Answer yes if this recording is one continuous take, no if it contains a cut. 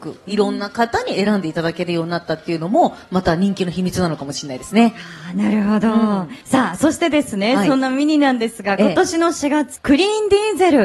no